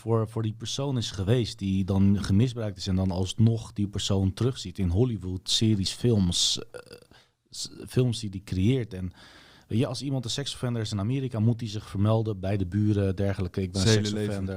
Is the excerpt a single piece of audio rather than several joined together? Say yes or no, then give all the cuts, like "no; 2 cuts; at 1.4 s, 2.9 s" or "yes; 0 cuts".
yes; 0 cuts